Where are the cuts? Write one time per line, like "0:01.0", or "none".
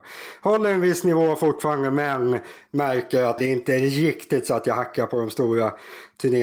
0:03.4

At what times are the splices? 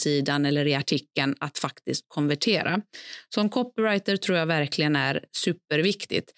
none

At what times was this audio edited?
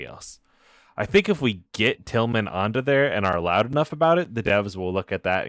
none

